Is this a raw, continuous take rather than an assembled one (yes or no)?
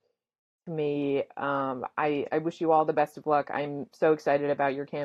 yes